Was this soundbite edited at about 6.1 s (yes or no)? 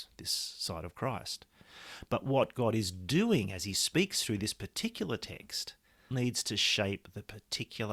yes